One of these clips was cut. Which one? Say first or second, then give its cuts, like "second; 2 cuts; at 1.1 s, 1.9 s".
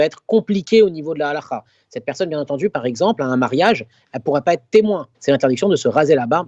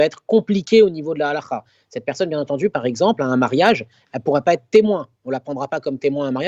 first; 1 cut; at 5.1 s